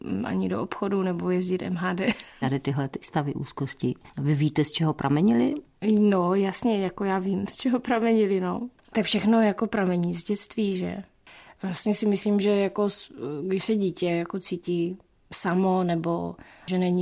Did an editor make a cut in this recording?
yes; 1 cut; at 2.4 s

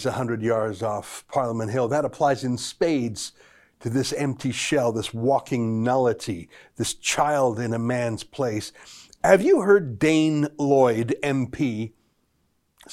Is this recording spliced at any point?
no; 0 cuts

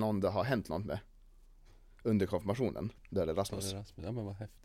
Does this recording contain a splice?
yes; 1 cut; at 3.0 s

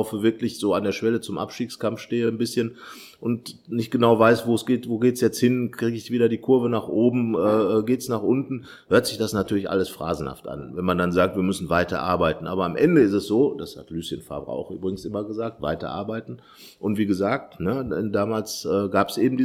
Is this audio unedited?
yes; 0 cuts

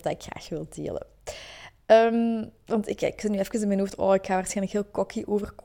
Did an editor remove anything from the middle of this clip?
no; 0 cuts

